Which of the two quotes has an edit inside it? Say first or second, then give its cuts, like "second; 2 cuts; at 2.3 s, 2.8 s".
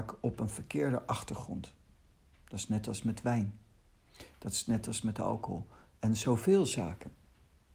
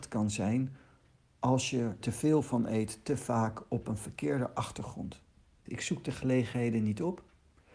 second; 2 cuts; at 2.0 s, 5.7 s